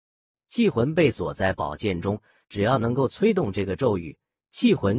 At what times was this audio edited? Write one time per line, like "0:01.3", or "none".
0:02.4